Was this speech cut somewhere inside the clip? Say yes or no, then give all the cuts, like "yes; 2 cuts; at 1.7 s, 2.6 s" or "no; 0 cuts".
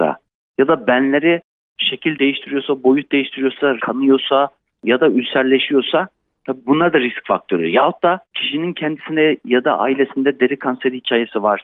yes; 2 cuts; at 3.8 s, 8.2 s